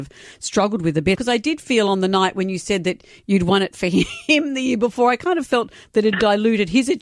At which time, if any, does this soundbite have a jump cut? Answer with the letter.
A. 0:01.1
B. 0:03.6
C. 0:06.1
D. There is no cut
A